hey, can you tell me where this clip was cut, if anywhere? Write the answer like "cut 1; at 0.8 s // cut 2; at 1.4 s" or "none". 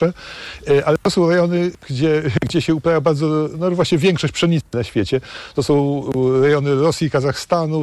none

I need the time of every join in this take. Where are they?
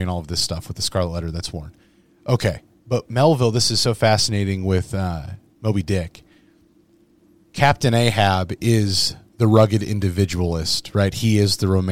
none

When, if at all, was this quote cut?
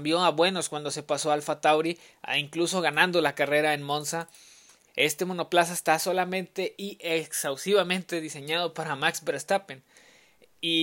cut 1; at 4.9 s

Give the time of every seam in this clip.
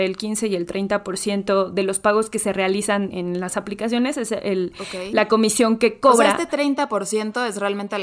cut 1; at 3.1 s

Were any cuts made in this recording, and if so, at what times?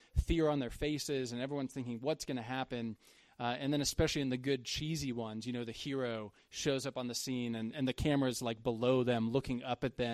cut 1; at 7.7 s

